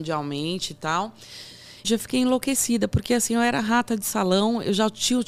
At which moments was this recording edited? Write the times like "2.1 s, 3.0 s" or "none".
1.8 s

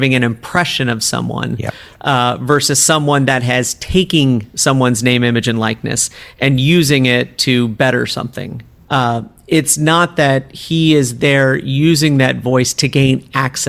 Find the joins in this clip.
8.9 s

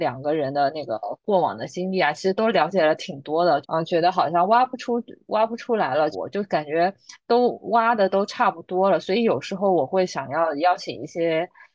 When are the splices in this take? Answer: 3.6 s, 6.1 s

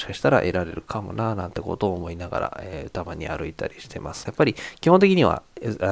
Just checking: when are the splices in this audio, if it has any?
4.3 s

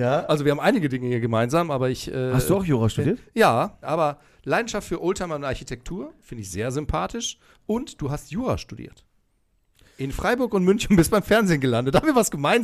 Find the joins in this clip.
3.8 s

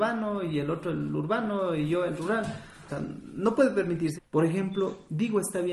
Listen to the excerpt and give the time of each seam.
2.9 s, 4.2 s

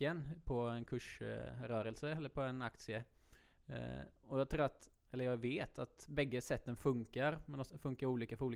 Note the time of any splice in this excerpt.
none

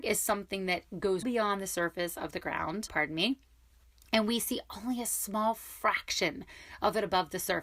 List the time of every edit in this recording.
1.2 s, 2.9 s

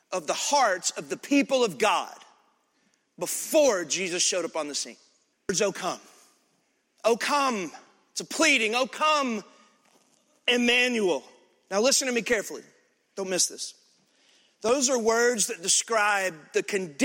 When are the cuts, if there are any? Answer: 5.3 s

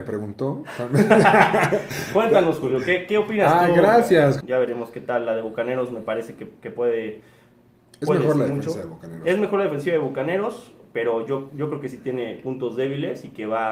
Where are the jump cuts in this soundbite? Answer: 4.4 s

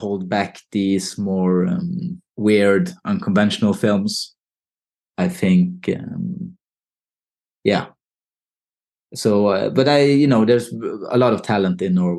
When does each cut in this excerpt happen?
2.3 s

